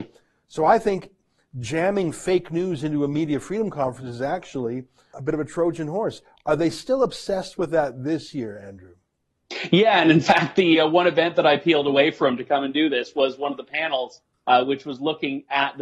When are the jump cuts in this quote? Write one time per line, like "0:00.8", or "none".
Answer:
0:05.1